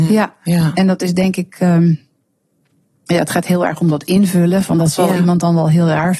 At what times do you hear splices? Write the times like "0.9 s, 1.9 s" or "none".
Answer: none